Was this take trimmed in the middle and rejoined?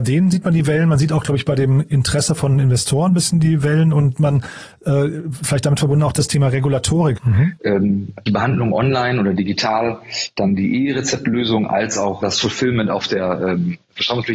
yes; 3 cuts; at 7.2 s, 8.3 s, 12.2 s

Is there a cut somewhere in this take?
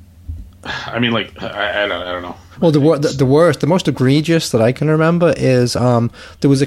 no; 0 cuts

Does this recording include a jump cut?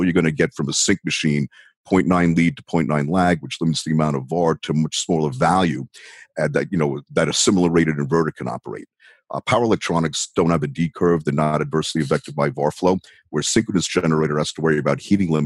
no; 0 cuts

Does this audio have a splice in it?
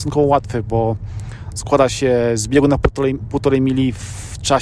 no; 0 cuts

